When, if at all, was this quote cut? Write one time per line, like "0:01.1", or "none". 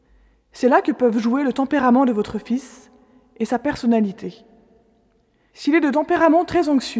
none